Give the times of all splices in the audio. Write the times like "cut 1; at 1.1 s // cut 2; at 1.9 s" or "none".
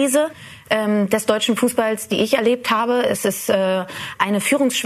none